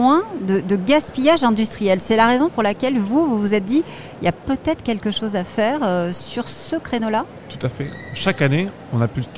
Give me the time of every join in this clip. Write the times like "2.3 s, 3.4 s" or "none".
none